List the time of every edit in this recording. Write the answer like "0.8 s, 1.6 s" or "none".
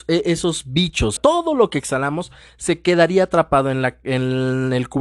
1.2 s